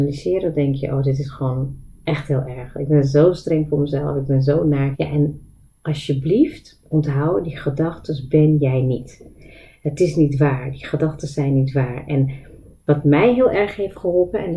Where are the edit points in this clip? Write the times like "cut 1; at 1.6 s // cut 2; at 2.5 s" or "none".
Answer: cut 1; at 4.9 s